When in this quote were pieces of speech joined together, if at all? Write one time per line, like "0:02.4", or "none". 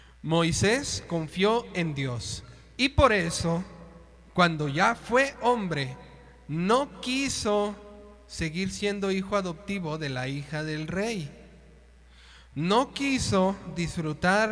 none